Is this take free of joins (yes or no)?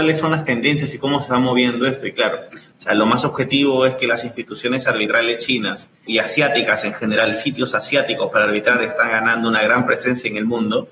no